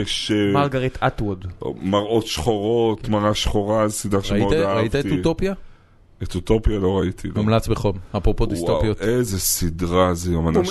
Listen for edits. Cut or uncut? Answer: uncut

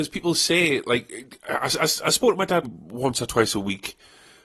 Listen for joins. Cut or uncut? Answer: cut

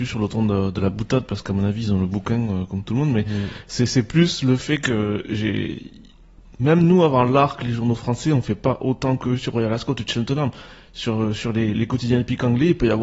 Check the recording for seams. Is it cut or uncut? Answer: cut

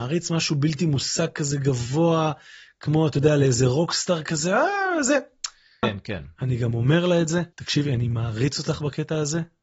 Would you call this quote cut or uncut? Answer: cut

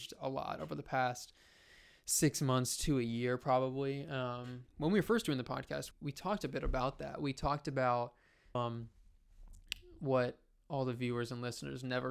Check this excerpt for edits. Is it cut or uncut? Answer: cut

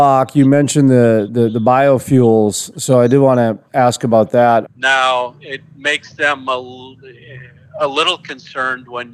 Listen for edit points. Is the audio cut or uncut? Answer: cut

